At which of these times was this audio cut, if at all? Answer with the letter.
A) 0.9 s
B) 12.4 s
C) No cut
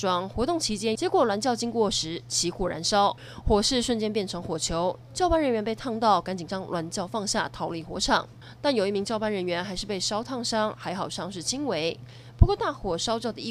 A